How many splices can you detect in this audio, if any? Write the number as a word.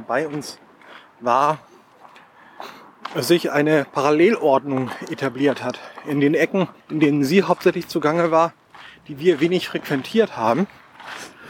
one